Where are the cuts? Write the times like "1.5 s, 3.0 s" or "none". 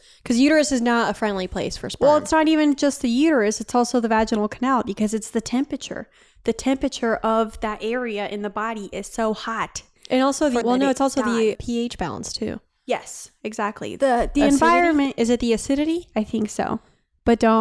10.6 s